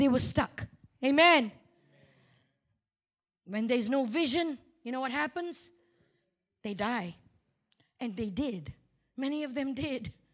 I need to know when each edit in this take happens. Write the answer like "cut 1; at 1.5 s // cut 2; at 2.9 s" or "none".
none